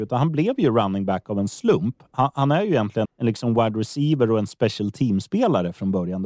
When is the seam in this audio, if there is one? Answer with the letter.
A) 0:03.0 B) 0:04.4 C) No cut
A